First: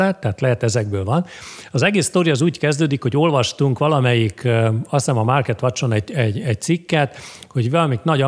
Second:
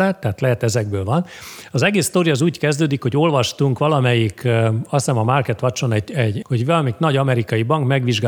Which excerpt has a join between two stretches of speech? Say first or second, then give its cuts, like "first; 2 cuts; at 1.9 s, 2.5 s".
second; 1 cut; at 6.4 s